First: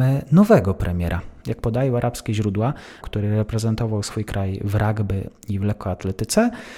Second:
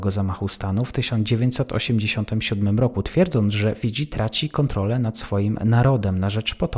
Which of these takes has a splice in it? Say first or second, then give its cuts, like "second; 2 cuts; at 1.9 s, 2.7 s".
first; 2 cuts; at 1.4 s, 3.0 s